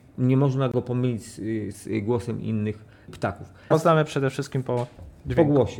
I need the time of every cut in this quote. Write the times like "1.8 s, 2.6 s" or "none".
1.7 s, 3.7 s